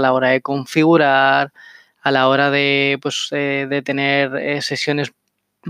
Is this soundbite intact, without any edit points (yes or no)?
yes